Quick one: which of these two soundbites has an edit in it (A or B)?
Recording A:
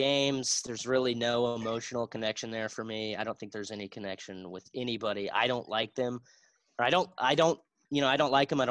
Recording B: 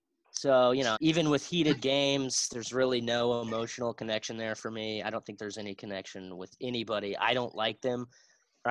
B